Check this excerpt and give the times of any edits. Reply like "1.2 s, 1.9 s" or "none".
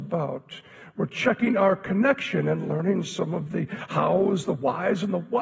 none